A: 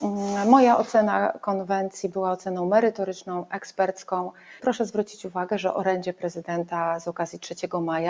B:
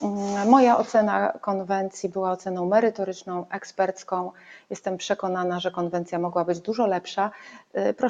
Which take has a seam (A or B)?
A